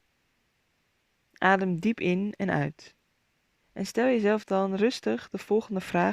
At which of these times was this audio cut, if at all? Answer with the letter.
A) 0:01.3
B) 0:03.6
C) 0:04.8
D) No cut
B